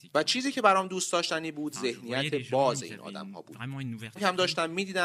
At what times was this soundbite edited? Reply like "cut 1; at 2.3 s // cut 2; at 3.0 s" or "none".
cut 1; at 4.2 s